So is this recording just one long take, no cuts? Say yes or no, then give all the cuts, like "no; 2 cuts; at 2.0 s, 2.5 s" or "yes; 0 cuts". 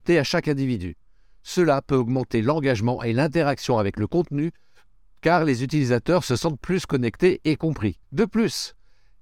no; 1 cut; at 8.0 s